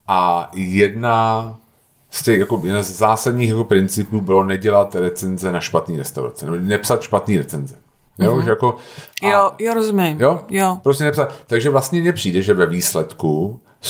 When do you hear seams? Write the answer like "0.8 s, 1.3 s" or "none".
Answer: none